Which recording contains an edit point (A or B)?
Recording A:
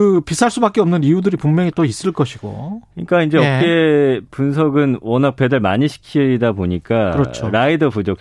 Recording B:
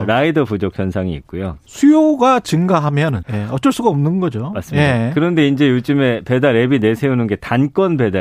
B